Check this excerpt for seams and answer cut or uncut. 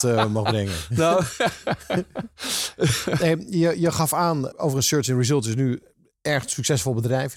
cut